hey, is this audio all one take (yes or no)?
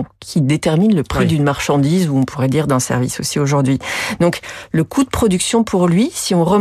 yes